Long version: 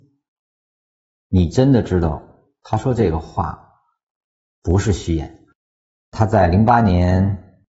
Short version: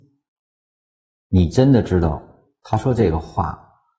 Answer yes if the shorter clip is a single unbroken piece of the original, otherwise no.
yes